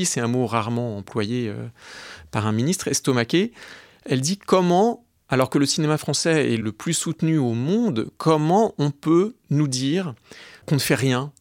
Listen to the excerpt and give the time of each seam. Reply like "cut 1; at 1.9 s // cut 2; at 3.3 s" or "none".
none

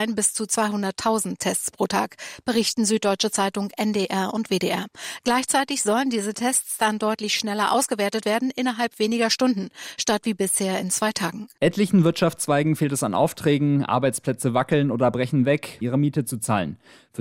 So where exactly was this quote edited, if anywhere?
cut 1; at 11.6 s // cut 2; at 15.8 s

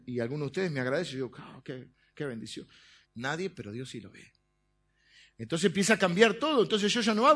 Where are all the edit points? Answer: cut 1; at 3.0 s

